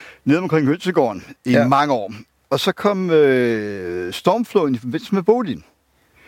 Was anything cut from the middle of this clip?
no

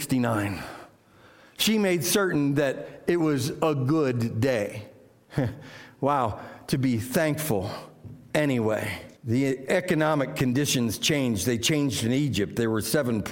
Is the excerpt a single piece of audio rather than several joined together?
no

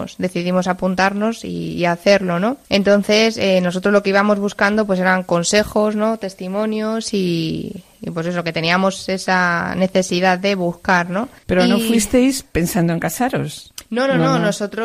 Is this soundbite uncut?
yes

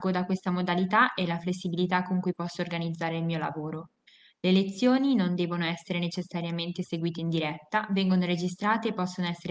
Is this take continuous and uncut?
yes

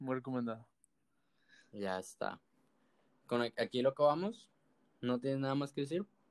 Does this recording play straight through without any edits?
yes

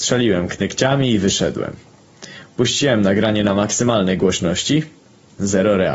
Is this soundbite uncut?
yes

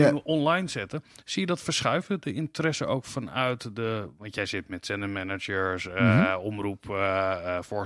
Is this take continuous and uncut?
yes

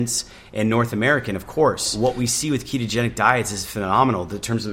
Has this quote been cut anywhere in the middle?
no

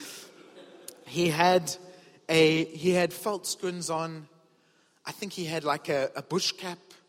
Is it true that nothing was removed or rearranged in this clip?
yes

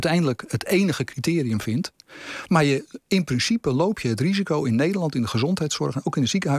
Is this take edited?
no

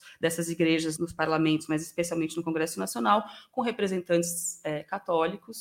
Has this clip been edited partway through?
yes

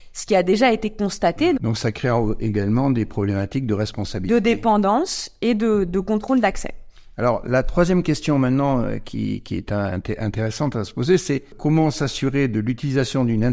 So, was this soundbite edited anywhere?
yes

